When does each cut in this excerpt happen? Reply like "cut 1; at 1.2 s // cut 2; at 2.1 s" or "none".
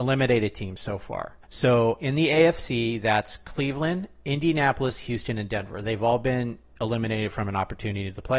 cut 1; at 1.4 s